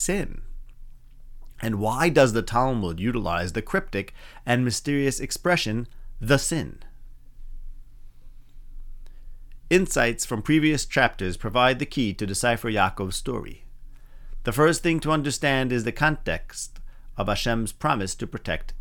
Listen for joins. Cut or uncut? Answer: uncut